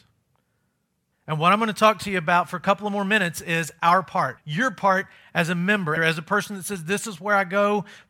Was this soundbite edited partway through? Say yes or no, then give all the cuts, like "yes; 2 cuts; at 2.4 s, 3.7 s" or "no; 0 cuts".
yes; 3 cuts; at 1.1 s, 4.4 s, 6.0 s